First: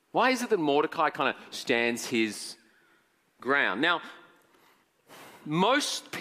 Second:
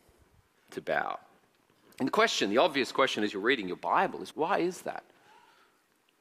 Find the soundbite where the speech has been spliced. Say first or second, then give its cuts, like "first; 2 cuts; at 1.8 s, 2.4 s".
second; 1 cut; at 4.3 s